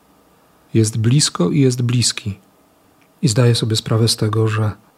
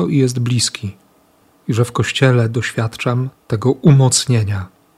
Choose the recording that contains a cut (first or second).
second